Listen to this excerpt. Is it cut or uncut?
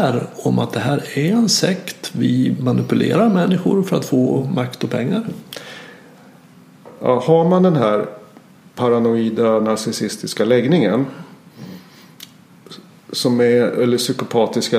uncut